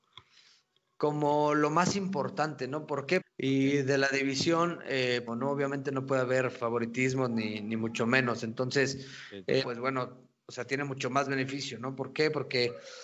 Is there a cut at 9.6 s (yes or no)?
yes